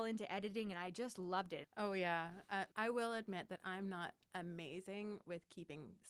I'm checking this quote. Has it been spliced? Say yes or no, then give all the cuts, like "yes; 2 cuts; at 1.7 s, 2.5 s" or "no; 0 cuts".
yes; 2 cuts; at 1.6 s, 2.7 s